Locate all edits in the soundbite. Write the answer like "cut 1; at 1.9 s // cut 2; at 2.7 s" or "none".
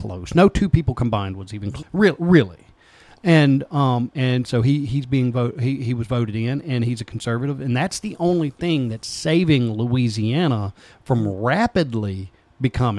cut 1; at 1.8 s